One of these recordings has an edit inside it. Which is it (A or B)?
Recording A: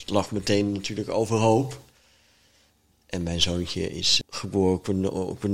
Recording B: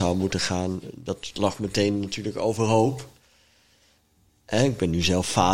A